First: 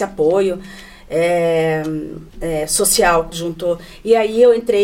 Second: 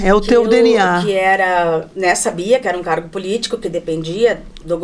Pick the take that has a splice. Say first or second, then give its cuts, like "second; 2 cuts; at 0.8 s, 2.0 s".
first; 2 cuts; at 2.3 s, 3.3 s